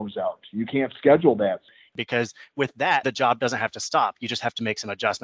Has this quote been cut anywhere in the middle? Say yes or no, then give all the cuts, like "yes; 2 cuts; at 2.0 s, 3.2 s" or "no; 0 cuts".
yes; 2 cuts; at 1.9 s, 3.0 s